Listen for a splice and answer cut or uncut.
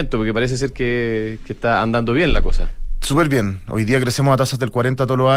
uncut